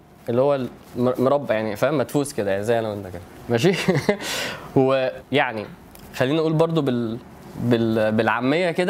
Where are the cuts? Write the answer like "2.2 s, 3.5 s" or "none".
5.2 s